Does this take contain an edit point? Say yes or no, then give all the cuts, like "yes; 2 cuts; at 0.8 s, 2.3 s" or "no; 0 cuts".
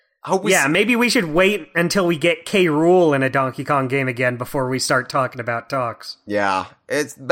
no; 0 cuts